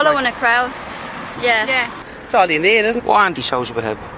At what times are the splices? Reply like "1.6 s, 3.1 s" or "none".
1.4 s, 3.0 s